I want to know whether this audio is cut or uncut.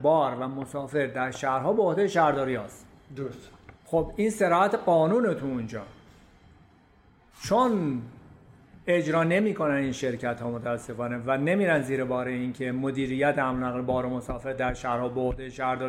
cut